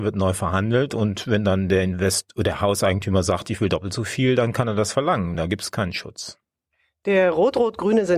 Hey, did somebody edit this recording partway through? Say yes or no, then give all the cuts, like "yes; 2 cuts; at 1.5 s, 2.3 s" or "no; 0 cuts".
no; 0 cuts